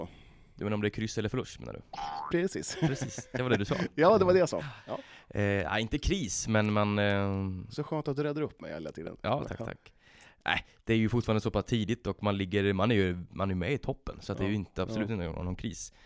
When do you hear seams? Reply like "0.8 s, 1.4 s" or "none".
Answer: 2.3 s, 9.4 s